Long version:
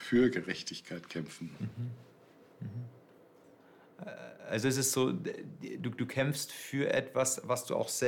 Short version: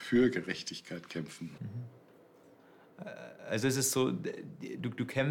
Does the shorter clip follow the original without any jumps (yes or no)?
no